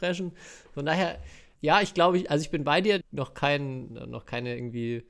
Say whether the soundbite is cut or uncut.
cut